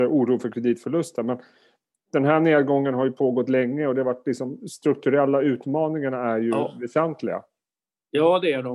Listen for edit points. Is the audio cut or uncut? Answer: uncut